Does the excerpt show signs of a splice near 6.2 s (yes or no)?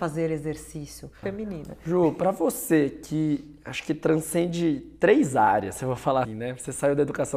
yes